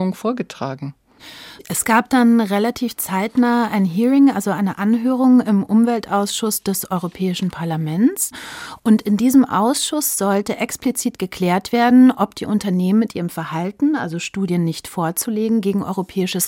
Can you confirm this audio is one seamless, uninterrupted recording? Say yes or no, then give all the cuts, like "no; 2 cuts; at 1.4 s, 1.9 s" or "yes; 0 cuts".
no; 1 cut; at 1.6 s